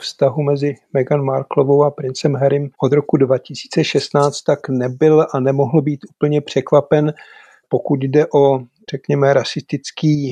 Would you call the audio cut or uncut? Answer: cut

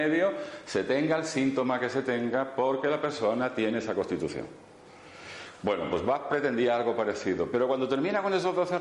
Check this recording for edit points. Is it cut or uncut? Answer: uncut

